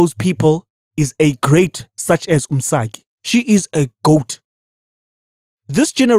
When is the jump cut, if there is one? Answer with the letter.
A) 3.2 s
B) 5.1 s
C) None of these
A